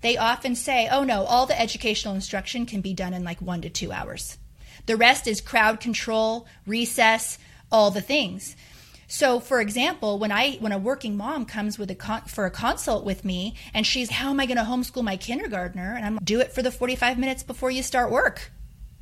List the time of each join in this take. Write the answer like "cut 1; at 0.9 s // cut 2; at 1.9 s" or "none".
cut 1; at 14.1 s // cut 2; at 16.2 s

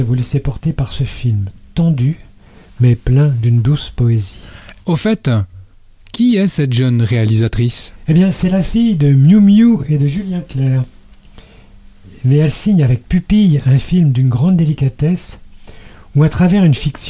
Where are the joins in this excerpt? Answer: cut 1; at 4.8 s

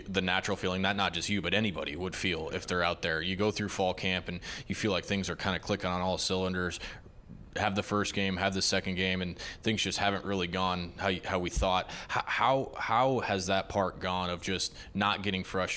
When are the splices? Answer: none

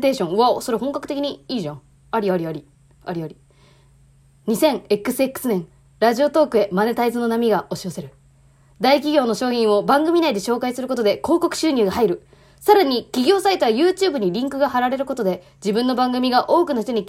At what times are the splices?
none

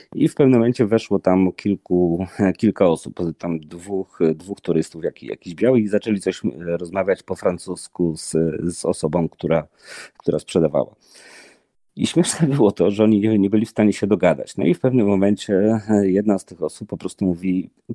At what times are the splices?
none

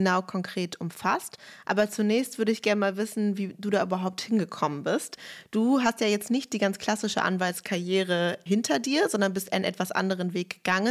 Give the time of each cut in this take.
none

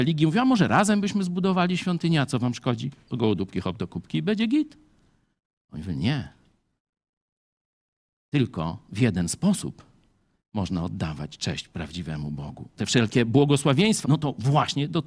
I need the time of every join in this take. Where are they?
cut 1; at 3.1 s // cut 2; at 12.8 s // cut 3; at 14.0 s

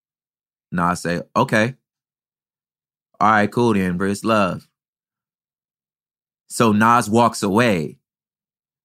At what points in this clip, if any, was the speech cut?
cut 1; at 4.0 s

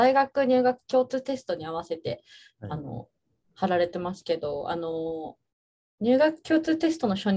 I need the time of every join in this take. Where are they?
none

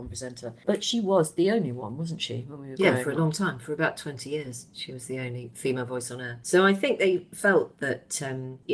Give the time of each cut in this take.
none

